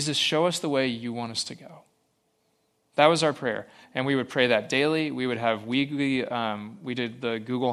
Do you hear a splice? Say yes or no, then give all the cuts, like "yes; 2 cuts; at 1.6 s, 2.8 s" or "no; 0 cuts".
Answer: no; 0 cuts